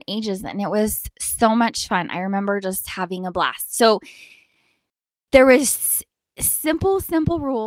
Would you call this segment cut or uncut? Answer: uncut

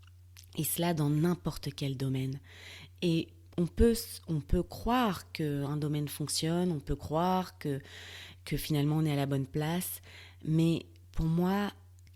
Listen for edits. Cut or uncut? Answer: uncut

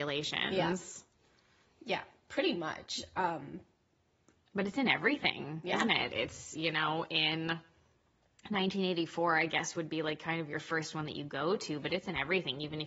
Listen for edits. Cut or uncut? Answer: uncut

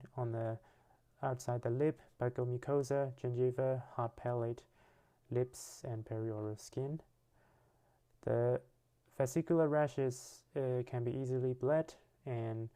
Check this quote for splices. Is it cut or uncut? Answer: uncut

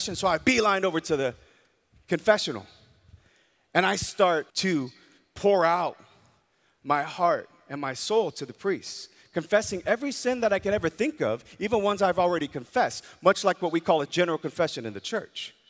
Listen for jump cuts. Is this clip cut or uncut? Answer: cut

